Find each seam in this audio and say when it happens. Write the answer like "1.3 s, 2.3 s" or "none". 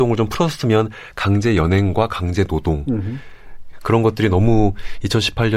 3.8 s